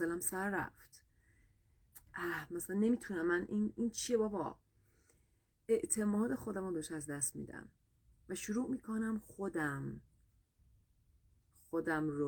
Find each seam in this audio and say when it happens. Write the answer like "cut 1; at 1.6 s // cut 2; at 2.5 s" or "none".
none